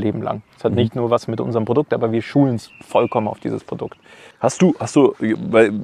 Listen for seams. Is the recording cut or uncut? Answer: uncut